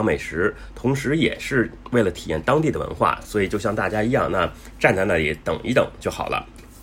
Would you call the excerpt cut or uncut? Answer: uncut